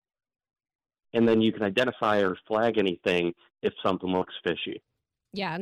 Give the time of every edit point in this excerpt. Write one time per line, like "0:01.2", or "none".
0:01.0